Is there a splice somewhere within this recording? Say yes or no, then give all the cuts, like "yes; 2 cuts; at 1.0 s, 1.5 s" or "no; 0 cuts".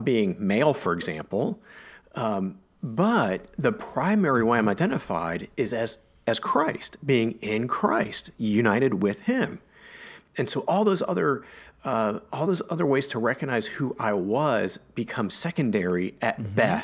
no; 0 cuts